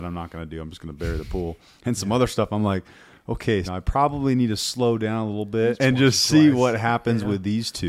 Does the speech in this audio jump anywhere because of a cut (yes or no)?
yes